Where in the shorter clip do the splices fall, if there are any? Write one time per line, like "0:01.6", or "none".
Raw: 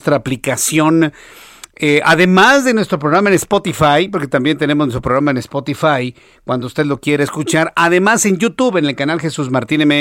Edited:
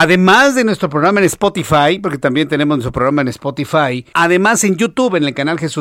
0:04.1

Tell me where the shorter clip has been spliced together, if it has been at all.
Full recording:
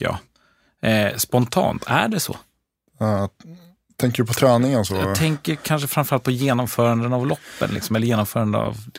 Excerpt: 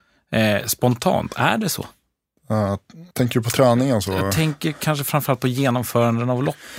0:03.1

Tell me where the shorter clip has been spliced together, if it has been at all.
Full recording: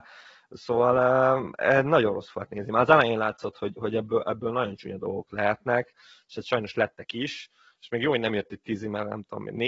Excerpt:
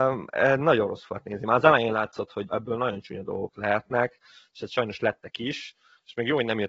0:02.5

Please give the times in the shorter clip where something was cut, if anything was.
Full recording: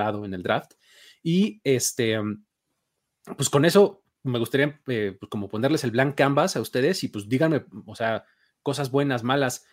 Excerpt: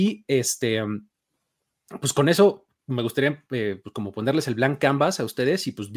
none

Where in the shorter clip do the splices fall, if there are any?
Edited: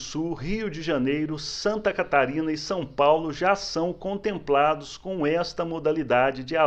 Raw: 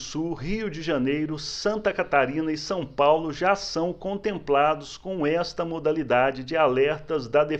none

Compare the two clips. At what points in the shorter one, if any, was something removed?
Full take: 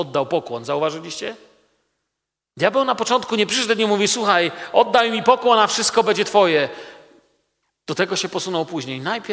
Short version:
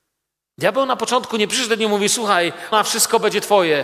0:02.7

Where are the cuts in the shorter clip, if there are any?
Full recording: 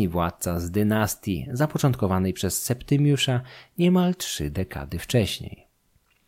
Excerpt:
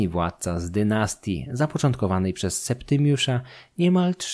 none

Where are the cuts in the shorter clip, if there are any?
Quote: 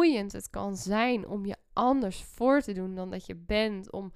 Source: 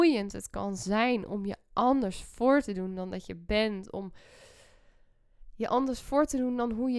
none

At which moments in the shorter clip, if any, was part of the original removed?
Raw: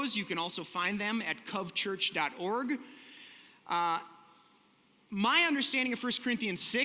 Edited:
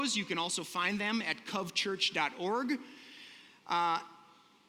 none

